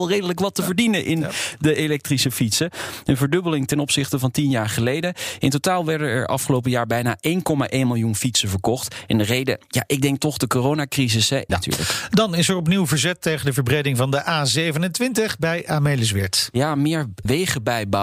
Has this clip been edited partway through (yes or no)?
yes